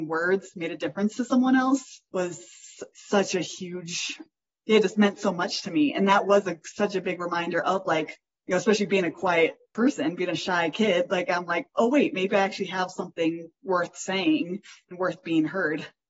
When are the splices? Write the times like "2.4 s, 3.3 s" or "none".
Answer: none